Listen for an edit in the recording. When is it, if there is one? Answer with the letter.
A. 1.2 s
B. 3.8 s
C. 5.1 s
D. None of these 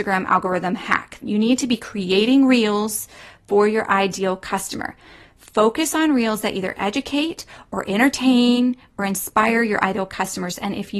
A